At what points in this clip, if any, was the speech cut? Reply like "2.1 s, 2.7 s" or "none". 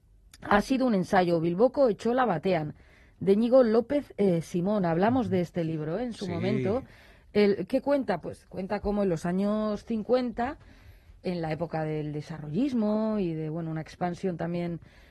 none